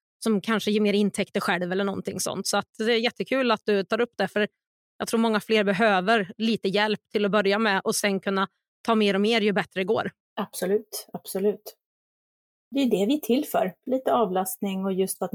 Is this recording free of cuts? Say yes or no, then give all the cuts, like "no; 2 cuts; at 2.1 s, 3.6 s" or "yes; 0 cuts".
yes; 0 cuts